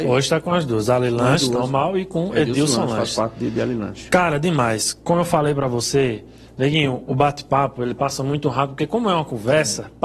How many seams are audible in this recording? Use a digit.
0